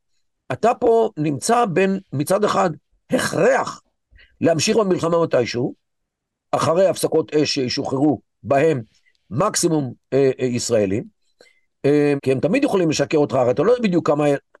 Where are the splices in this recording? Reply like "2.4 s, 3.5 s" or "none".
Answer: 12.2 s